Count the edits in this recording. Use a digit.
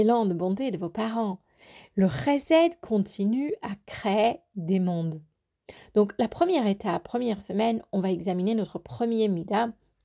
0